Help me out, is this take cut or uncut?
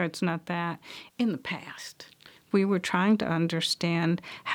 cut